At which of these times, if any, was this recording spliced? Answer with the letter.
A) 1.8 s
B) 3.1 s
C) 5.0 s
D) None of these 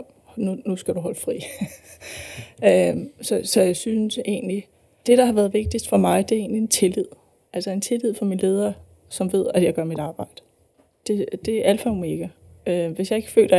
C